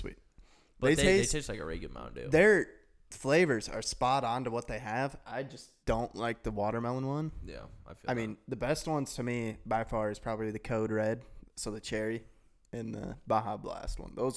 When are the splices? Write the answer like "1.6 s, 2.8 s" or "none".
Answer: 5.8 s